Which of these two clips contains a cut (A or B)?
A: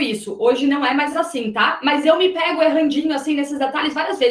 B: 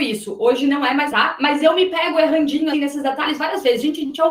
B